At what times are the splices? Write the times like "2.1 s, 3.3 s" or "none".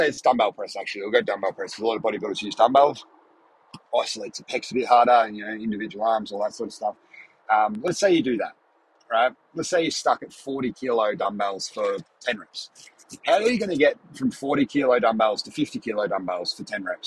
none